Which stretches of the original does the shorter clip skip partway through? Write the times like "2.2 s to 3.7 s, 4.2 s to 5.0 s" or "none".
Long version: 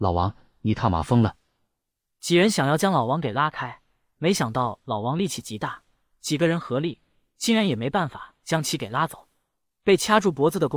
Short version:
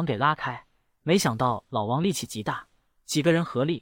none

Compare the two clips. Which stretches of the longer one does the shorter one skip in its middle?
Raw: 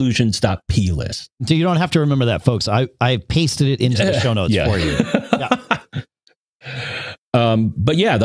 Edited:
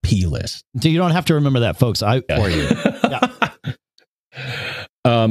2.9 s to 4.6 s

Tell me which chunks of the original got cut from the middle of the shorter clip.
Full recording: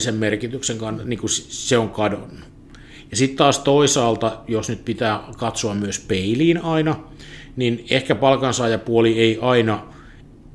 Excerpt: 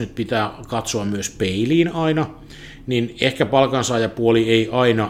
none

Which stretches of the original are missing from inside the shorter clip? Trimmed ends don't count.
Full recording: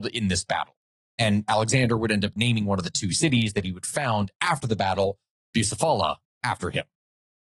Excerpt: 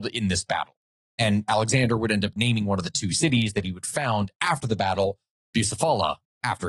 none

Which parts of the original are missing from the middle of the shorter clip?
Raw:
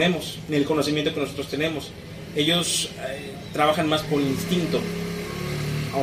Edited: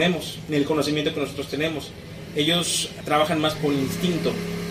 3.0 s to 3.5 s

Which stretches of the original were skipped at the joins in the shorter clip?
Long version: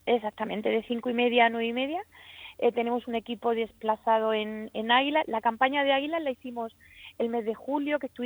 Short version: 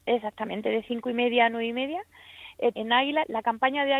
2.7 s to 4.7 s

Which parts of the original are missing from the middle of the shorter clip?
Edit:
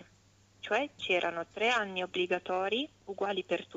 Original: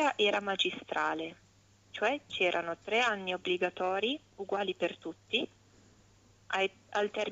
none

